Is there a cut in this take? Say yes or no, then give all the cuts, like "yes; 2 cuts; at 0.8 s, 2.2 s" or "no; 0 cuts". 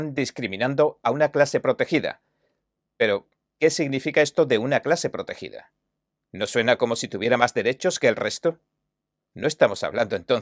no; 0 cuts